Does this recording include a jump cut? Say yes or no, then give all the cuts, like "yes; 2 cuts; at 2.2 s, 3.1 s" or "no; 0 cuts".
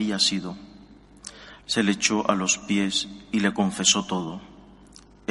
yes; 1 cut; at 1.6 s